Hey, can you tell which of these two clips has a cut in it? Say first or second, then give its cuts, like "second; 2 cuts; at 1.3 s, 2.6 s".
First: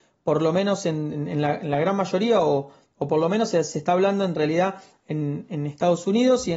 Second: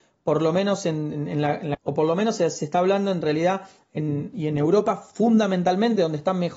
second; 2 cuts; at 1.7 s, 4.3 s